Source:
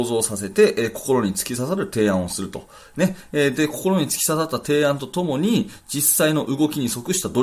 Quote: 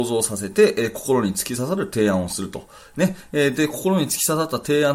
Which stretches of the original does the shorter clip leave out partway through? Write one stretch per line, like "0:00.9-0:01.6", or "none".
none